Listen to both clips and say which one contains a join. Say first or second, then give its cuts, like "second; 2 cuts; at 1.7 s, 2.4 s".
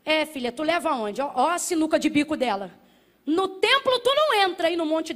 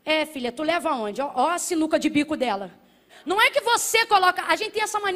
second; 1 cut; at 3.1 s